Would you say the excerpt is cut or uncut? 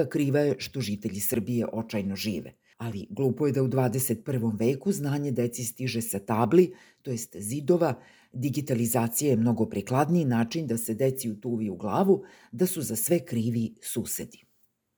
cut